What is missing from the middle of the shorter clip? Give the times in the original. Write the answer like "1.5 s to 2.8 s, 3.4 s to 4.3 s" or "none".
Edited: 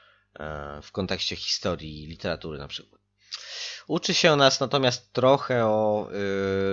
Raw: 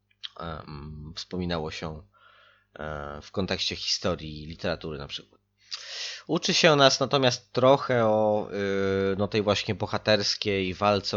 none